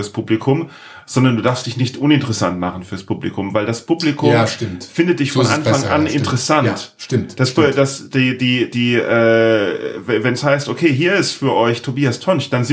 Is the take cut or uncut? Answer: uncut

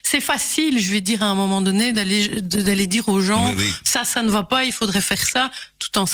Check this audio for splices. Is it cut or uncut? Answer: uncut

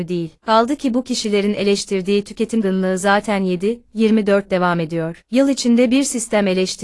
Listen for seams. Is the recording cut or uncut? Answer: cut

